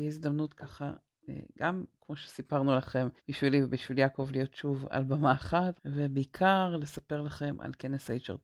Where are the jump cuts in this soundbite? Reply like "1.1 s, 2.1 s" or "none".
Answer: 3.2 s, 5.8 s